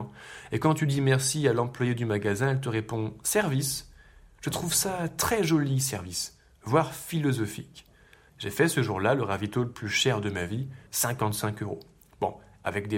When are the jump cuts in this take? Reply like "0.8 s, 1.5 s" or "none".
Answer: 8.3 s, 10.9 s